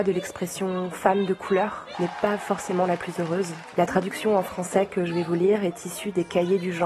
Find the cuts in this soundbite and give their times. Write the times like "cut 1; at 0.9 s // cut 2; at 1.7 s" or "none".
cut 1; at 1.9 s // cut 2; at 3.7 s